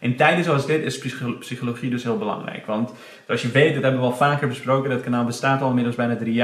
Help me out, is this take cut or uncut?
uncut